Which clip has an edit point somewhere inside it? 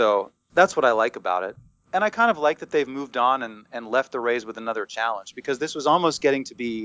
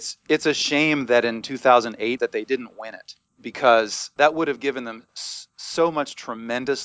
second; 2 cuts; at 2.2 s, 4.2 s

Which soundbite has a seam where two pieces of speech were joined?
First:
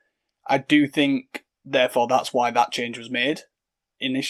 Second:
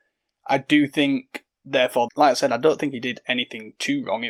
second; 1 cut; at 2.1 s

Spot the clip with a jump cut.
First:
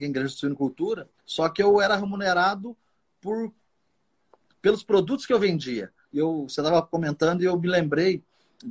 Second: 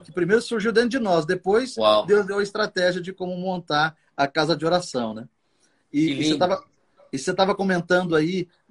first; 2 cuts; at 1.2 s, 6.1 s

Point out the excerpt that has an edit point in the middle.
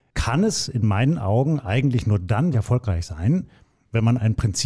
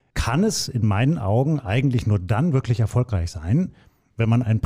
first; 1 cut; at 2.5 s

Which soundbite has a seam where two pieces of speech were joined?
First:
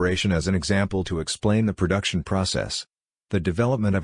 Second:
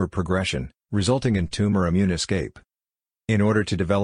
first; 1 cut; at 3.1 s

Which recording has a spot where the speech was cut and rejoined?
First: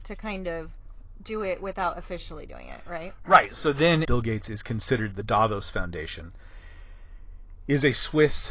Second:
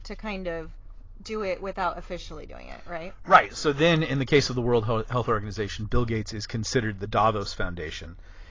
first; 1 cut; at 4.0 s

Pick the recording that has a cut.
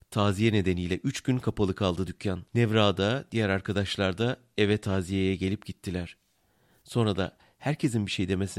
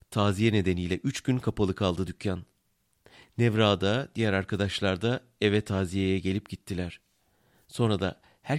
first; 1 cut; at 2.5 s

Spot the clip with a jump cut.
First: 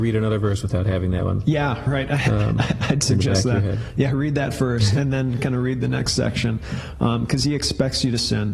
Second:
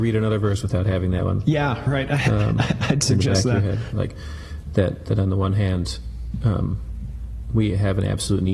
second; 1 cut; at 3.9 s

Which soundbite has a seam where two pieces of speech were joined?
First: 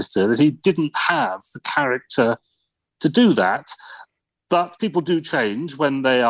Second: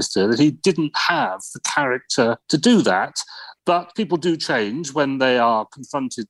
second; 2 cuts; at 2.4 s, 3.6 s

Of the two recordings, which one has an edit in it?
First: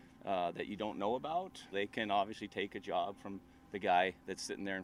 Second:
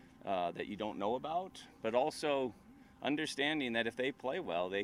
first; 1 cut; at 1.7 s

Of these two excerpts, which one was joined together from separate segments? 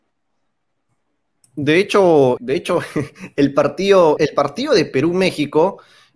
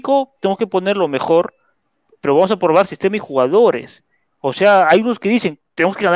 first; 2 cuts; at 2.4 s, 4.2 s

